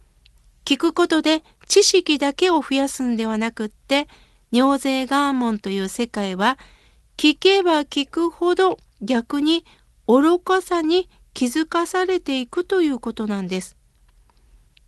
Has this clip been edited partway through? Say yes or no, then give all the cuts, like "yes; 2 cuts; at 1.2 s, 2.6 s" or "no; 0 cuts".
no; 0 cuts